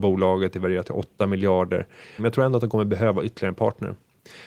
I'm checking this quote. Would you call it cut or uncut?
cut